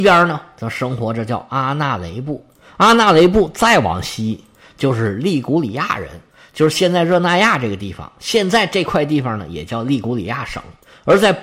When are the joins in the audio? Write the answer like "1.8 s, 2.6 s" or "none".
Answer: none